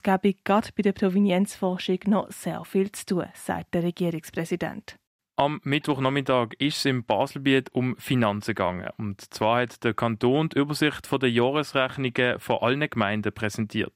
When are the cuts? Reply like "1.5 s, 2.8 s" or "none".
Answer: none